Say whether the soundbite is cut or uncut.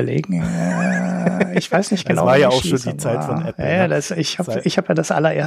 uncut